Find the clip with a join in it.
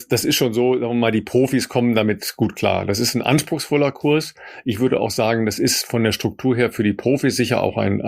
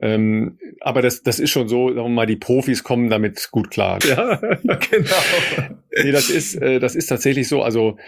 second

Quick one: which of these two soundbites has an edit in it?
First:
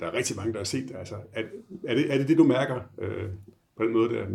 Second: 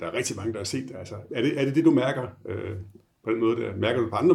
second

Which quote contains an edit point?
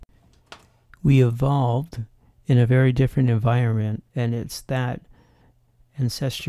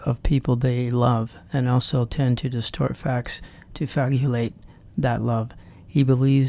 first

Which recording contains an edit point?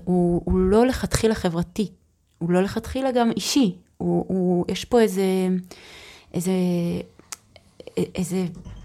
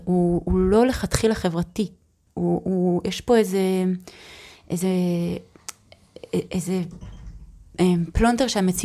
second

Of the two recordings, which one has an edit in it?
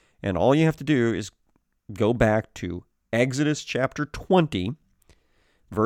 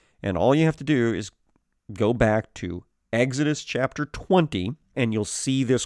second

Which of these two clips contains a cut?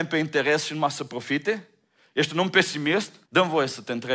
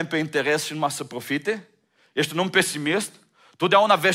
first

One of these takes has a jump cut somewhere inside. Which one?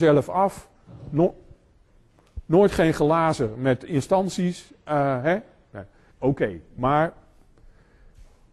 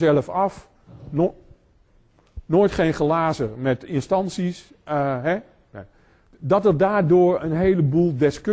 first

